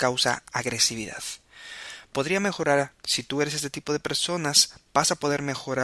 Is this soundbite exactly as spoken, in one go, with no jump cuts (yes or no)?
yes